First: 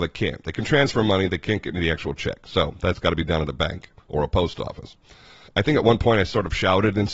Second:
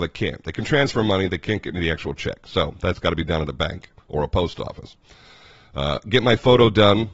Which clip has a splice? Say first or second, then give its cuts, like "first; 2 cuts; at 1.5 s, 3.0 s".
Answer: first; 1 cut; at 5.5 s